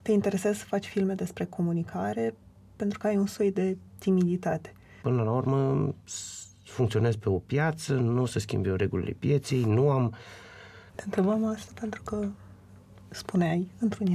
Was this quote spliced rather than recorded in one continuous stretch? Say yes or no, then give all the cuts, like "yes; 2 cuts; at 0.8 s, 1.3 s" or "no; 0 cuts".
yes; 2 cuts; at 5.0 s, 10.9 s